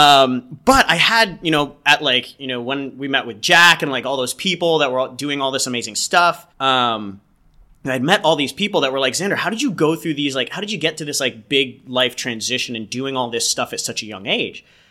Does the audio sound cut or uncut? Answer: cut